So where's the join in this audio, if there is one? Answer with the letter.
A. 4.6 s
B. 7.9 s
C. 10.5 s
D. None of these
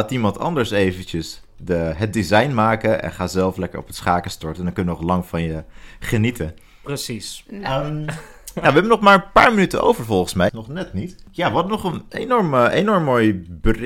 C